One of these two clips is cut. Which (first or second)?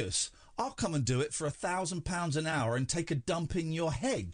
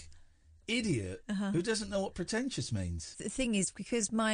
second